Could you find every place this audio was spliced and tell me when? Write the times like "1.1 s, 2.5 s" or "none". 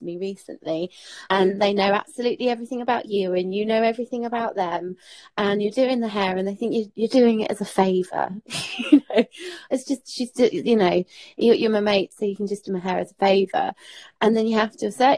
1.3 s, 7.1 s